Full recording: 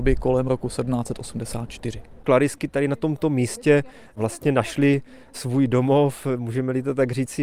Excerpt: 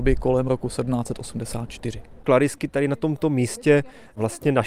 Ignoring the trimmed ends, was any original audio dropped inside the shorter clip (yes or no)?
no